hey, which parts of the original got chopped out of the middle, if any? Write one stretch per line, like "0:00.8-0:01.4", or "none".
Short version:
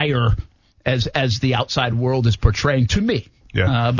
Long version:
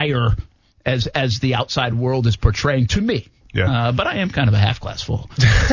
none